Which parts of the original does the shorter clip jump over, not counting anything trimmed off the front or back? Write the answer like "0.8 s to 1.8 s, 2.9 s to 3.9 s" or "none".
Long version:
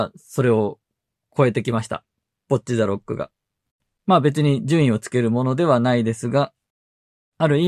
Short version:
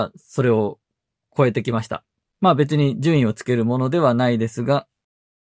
2.3 s to 3.9 s